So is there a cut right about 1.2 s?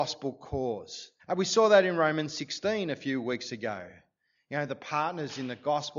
yes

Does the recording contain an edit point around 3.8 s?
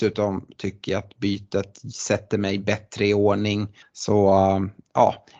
yes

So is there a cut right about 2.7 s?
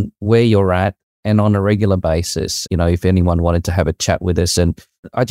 yes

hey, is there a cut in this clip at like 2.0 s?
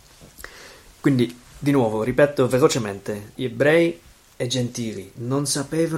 no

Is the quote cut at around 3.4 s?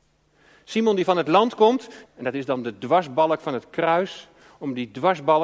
no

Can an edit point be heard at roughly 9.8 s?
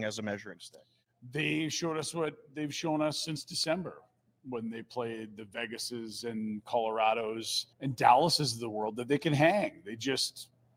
no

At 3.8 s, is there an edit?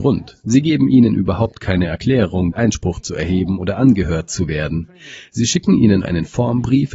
no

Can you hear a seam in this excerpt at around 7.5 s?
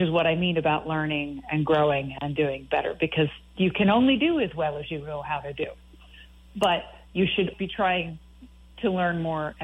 yes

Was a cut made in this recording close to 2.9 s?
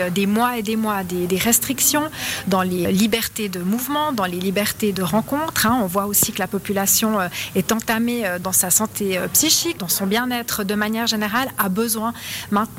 yes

